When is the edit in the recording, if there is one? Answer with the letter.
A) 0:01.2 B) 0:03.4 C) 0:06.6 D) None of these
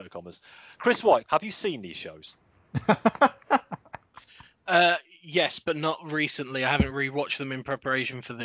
A